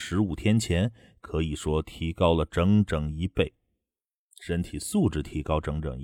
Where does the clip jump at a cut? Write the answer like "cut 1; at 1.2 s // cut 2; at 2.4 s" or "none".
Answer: none